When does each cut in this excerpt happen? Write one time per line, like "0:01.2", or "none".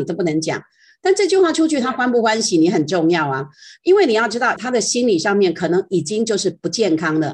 0:04.6